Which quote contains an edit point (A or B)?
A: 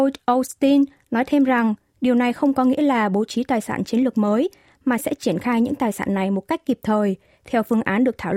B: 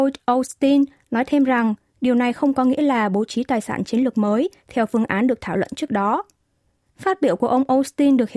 B